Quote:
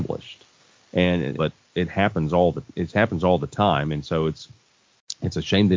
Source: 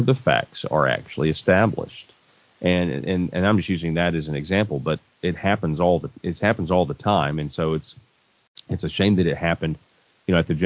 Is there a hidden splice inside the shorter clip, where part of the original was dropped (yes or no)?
yes